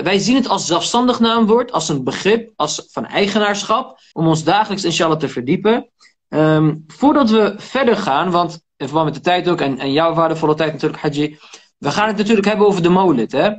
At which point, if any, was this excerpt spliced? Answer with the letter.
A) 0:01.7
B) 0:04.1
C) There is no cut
B